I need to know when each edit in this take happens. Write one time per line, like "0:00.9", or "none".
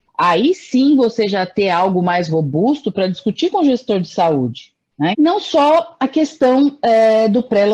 0:05.1

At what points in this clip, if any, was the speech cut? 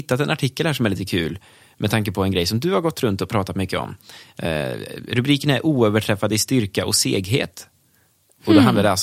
none

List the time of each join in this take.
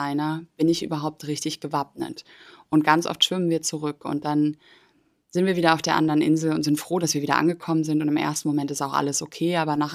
none

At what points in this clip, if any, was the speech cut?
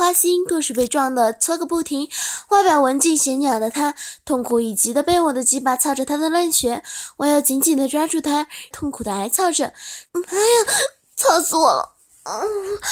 0:08.7
0:10.1

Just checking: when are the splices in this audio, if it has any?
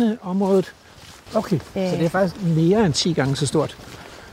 0:01.3

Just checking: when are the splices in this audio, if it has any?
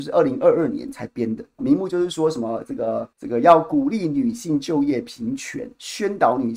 0:01.6
0:03.1

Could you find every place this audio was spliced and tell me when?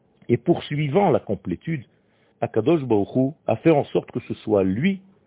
0:02.3
0:03.4

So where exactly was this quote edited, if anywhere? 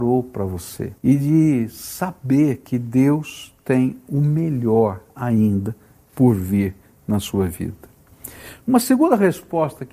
0:01.0

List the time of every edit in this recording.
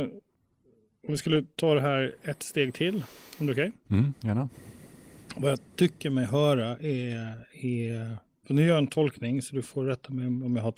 none

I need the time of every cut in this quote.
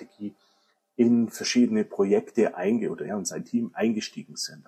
0:03.1

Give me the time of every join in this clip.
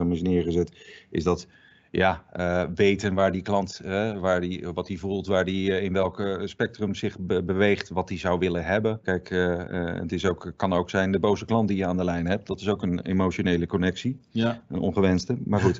0:09.0

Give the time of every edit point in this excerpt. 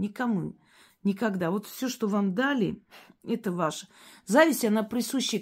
none

